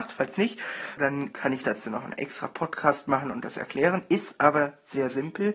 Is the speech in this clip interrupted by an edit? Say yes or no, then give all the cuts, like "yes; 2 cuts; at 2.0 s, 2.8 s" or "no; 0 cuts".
yes; 1 cut; at 1.0 s